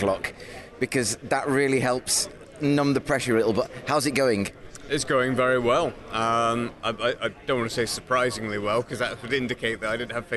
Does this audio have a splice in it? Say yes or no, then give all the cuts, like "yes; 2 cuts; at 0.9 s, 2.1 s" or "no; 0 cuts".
yes; 1 cut; at 6.8 s